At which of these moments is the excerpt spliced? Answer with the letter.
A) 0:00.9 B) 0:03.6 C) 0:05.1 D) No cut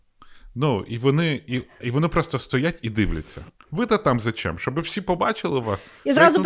B